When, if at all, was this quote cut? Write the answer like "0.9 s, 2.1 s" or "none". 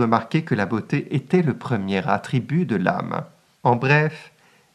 3.5 s